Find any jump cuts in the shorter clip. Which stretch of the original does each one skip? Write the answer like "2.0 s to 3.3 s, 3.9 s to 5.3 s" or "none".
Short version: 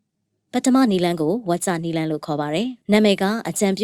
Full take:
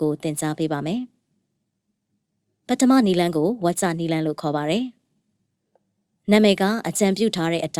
5.0 s to 6.2 s